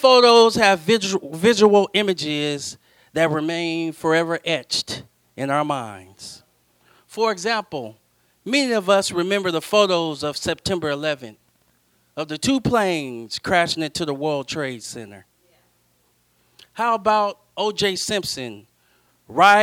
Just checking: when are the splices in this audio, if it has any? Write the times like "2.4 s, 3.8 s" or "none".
none